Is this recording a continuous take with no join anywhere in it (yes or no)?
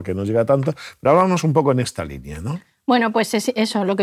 yes